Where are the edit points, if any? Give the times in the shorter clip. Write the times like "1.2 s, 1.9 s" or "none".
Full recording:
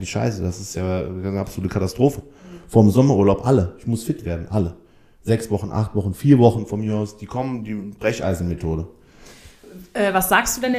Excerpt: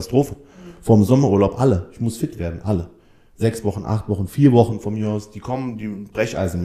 none